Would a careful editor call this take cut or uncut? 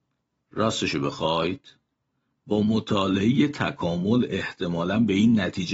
uncut